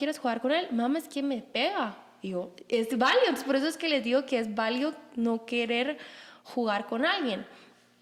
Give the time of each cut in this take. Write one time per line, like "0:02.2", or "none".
none